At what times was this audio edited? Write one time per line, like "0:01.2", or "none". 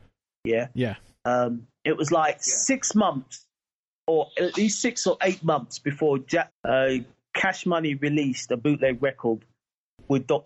0:06.5